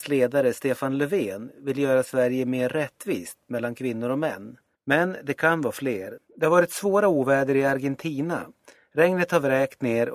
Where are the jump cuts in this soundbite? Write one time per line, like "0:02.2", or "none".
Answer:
0:04.8
0:06.2